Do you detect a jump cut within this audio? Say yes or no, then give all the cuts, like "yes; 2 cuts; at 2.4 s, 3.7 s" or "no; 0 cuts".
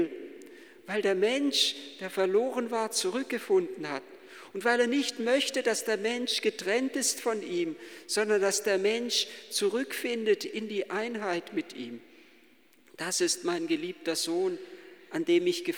no; 0 cuts